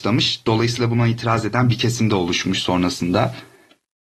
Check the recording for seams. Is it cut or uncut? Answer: uncut